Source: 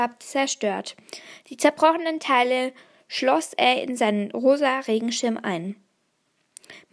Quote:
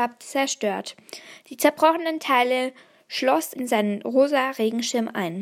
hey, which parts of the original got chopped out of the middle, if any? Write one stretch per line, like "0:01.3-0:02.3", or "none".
0:03.6-0:03.8